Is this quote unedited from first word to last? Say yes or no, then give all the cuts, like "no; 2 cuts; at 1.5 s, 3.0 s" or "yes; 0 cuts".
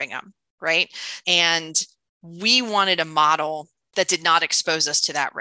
no; 1 cut; at 1.2 s